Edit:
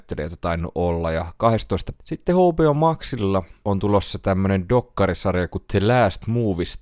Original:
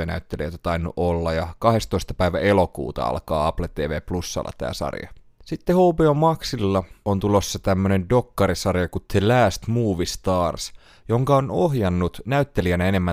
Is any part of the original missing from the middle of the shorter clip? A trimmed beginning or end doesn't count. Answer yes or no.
yes